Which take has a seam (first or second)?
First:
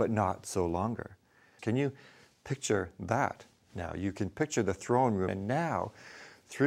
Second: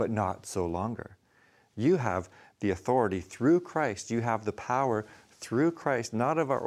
first